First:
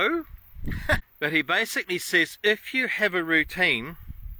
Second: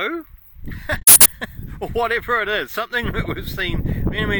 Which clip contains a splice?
first; 1 cut; at 1.0 s

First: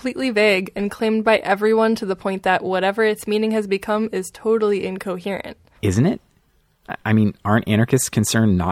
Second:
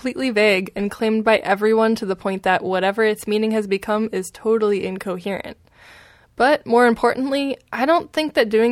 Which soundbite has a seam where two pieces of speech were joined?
first; 1 cut; at 5.8 s

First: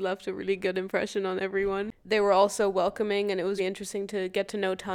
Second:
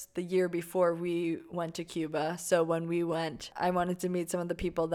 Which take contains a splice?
first; 1 cut; at 3.6 s

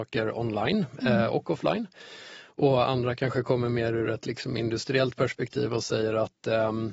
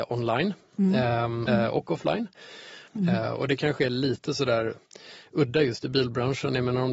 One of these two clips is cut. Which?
second; 2 cuts; at 1.5 s, 2.9 s

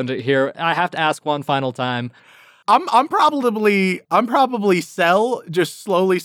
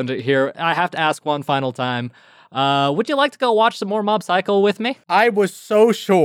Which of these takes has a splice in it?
first; 2 cuts; at 2.2 s, 4.0 s

